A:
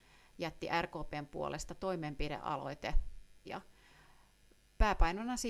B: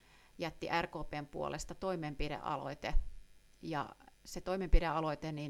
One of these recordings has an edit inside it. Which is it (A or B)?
A